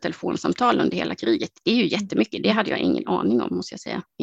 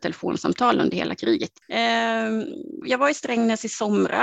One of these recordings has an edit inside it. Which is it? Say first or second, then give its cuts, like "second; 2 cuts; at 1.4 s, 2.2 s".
second; 2 cuts; at 1.6 s, 2.8 s